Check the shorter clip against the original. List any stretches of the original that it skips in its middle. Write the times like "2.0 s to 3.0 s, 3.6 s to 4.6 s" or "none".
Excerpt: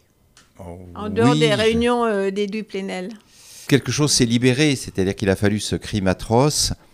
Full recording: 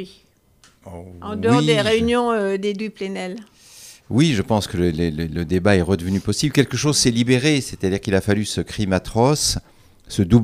3.9 s to 6.5 s